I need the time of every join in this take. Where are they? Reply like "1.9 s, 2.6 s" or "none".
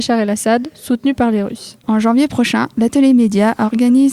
1.8 s